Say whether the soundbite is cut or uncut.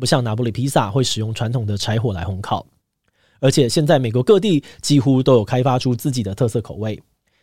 uncut